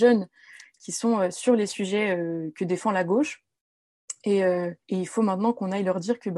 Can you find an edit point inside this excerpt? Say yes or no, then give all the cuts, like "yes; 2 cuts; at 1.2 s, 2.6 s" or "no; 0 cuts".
yes; 1 cut; at 4.8 s